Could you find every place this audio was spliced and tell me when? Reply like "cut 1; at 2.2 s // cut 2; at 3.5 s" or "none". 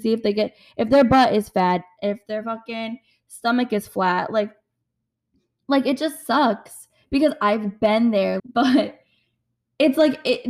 cut 1; at 8.4 s